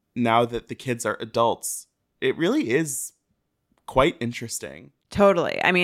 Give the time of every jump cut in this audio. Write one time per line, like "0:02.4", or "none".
none

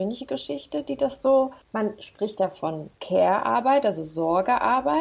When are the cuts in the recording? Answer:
0:01.6
0:02.9

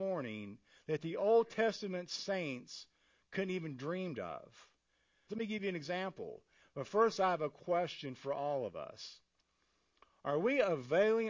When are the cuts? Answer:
0:05.3
0:06.6

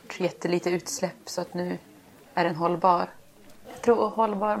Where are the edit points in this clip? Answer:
0:03.6

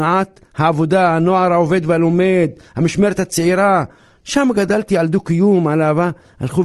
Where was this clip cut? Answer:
none

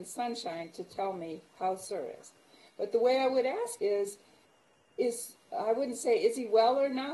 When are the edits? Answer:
0:03.8

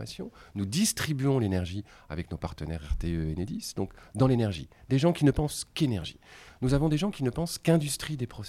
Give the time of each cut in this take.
none

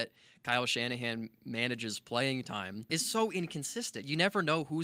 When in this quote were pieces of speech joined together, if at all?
0:02.9

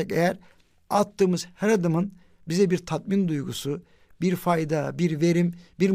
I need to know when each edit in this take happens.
none

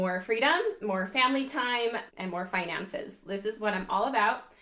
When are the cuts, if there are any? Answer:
0:02.1

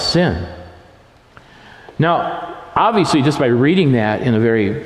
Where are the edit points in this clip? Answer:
none

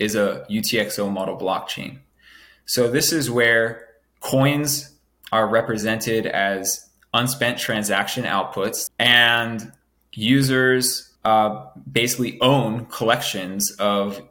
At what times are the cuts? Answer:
0:08.9
0:11.2

